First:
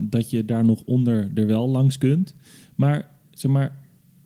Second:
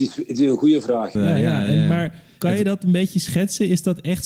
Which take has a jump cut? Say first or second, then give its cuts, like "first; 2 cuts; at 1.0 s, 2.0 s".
second; 1 cut; at 1.2 s